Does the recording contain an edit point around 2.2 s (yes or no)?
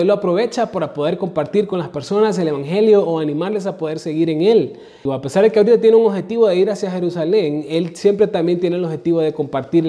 no